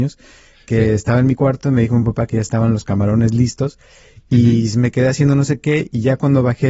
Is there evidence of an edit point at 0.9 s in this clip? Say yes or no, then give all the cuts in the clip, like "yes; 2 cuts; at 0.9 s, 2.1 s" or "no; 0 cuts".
no; 0 cuts